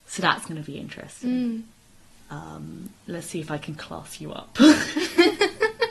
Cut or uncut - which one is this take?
uncut